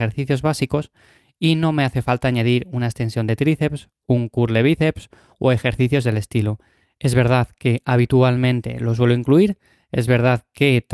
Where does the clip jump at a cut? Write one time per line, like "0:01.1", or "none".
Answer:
none